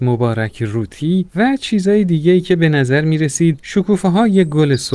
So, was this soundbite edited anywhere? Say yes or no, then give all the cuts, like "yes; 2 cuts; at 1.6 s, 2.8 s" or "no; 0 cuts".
no; 0 cuts